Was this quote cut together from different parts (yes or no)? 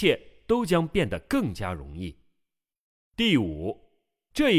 no